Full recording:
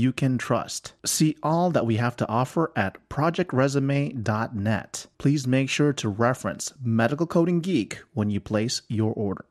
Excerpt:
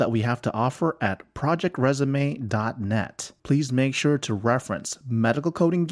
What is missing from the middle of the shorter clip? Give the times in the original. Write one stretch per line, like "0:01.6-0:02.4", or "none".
none